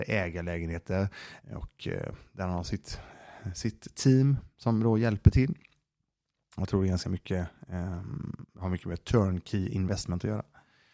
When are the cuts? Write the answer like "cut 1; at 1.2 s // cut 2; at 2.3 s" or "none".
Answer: cut 1; at 1.4 s